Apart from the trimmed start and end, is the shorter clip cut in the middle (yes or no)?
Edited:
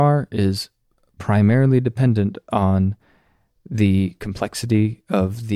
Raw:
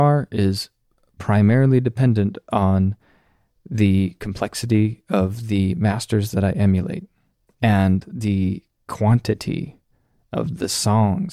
no